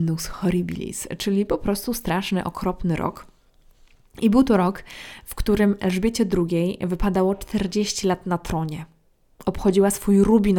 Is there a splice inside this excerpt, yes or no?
no